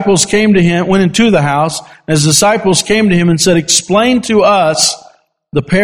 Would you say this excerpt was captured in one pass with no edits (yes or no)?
yes